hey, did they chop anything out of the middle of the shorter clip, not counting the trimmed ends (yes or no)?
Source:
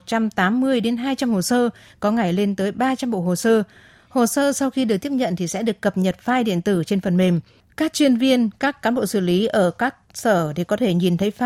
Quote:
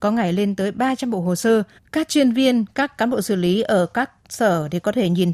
yes